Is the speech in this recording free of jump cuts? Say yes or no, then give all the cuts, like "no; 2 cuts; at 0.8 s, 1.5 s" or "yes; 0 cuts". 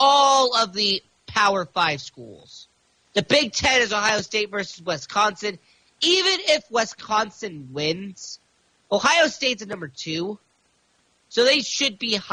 no; 1 cut; at 3.1 s